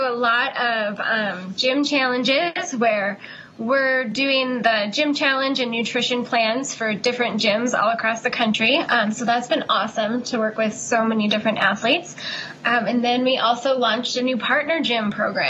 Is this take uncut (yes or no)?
yes